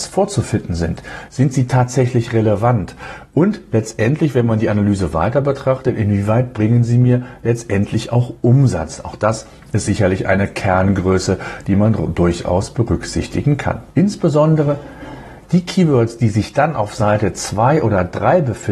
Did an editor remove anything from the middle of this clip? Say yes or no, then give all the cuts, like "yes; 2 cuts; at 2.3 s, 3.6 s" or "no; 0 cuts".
yes; 1 cut; at 1.3 s